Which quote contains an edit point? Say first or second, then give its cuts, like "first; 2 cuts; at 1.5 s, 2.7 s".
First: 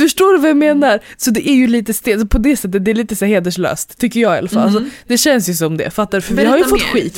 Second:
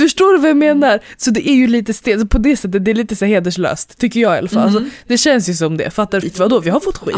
second; 1 cut; at 6.2 s